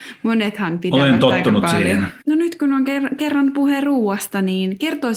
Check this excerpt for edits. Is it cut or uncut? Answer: cut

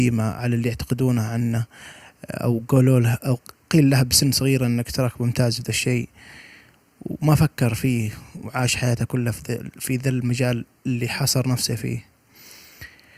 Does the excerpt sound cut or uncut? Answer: uncut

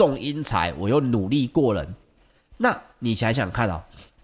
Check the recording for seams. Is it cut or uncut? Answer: cut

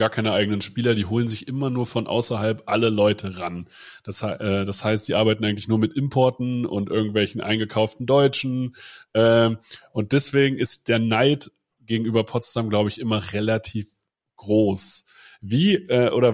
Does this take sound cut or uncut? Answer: uncut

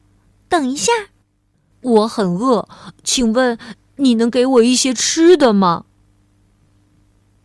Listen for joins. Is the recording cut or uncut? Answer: cut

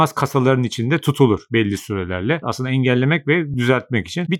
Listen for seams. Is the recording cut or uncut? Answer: cut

